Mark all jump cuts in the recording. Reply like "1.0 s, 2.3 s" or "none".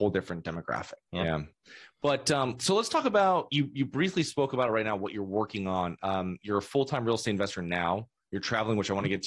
1.1 s